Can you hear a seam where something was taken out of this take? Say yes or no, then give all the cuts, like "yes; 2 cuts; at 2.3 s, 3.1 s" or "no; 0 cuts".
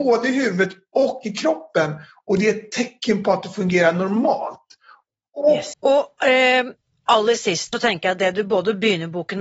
yes; 2 cuts; at 5.7 s, 7.7 s